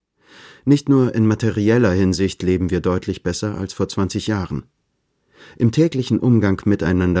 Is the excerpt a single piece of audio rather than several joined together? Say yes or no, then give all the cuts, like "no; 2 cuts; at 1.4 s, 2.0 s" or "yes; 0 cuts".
yes; 0 cuts